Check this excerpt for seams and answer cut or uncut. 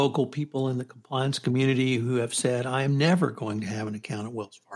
uncut